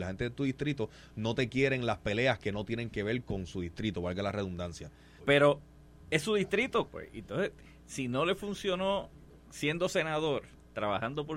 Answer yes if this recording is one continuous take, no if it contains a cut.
no